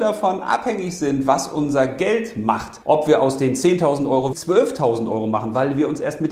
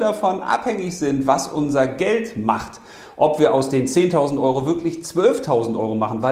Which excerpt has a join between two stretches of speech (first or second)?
first